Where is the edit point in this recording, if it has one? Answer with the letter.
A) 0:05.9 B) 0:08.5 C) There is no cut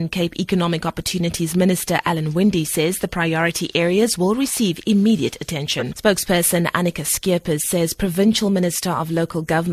A